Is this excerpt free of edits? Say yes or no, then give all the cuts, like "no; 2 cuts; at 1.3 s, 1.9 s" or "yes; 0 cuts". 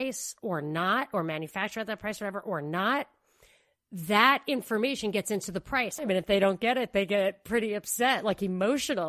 no; 1 cut; at 6.0 s